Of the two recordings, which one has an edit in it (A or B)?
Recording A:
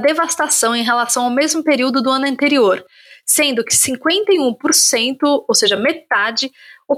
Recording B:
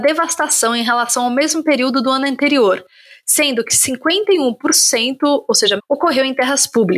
B